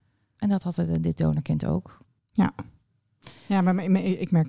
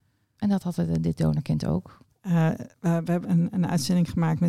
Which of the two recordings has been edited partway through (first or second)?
second